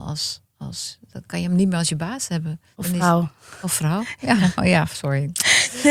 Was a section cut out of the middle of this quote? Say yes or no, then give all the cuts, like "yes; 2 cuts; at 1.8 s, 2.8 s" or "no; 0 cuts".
no; 0 cuts